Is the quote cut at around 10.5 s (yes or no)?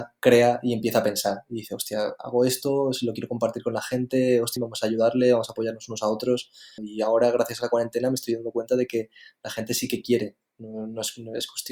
no